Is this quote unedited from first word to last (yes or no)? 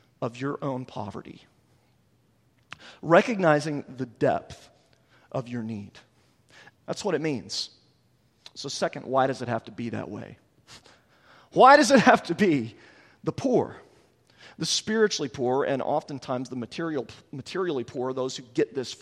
no